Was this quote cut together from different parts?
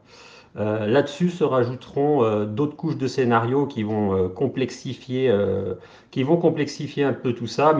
no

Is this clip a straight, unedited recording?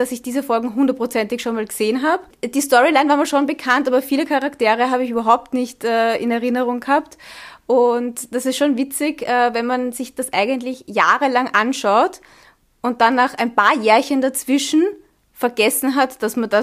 yes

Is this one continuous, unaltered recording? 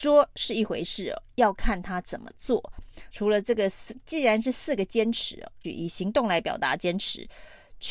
no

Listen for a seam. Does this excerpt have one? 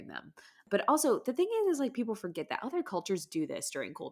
no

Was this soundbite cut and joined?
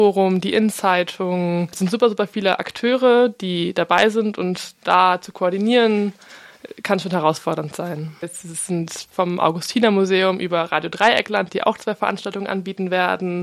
yes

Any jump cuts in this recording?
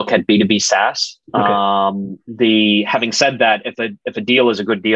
no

